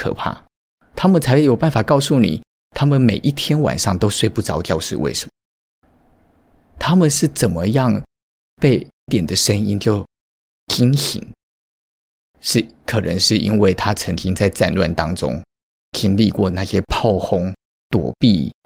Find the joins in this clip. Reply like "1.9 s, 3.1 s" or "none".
9.1 s

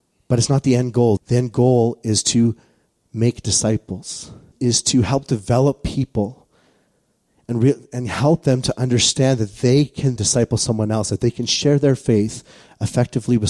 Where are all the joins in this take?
1.2 s, 4.5 s, 10.2 s

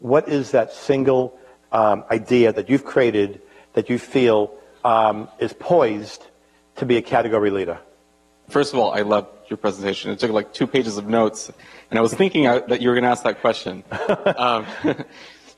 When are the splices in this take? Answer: 8.5 s

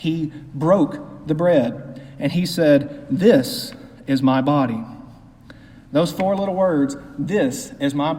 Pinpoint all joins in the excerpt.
none

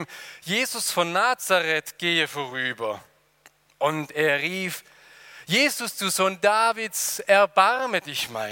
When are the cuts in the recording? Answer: none

